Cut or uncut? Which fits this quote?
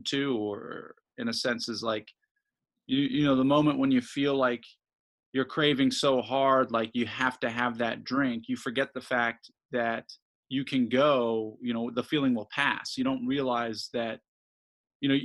uncut